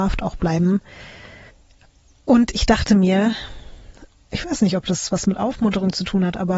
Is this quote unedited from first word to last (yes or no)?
yes